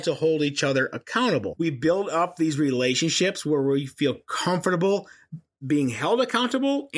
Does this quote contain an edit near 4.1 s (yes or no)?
no